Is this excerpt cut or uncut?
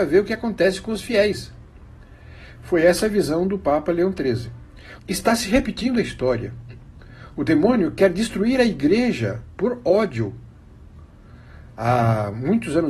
cut